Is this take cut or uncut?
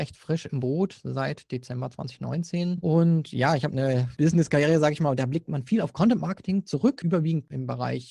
uncut